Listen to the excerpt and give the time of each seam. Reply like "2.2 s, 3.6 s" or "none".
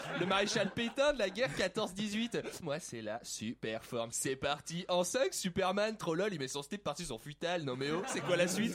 2.6 s, 4.1 s